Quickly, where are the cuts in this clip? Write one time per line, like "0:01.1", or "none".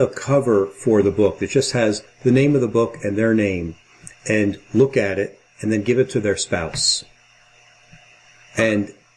none